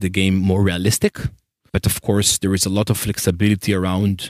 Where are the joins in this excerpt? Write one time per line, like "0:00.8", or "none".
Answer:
0:01.7